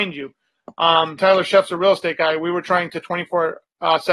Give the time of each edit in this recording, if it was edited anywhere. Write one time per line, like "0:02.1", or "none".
0:01.2